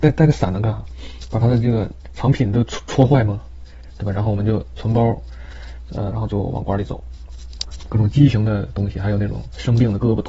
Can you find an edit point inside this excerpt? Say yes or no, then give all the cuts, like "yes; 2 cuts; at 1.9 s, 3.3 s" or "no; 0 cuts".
yes; 2 cuts; at 6.1 s, 7.9 s